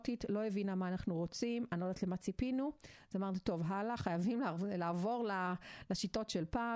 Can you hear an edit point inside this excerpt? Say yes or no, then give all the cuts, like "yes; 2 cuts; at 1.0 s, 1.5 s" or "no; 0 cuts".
no; 0 cuts